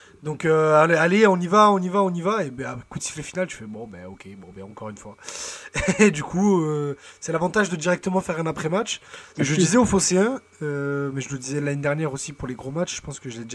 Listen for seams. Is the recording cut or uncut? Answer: cut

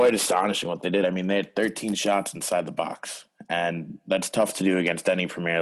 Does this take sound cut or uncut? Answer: uncut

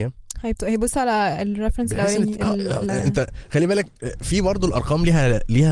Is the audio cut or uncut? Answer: cut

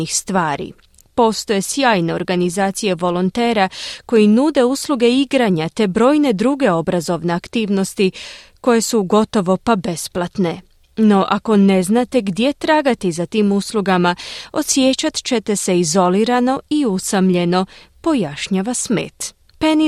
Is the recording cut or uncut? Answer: uncut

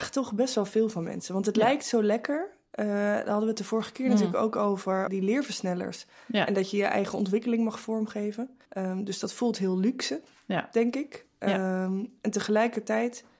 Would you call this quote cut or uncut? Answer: cut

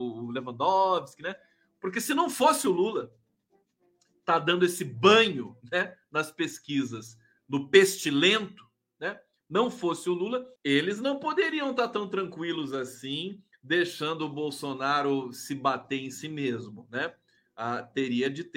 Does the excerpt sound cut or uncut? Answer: cut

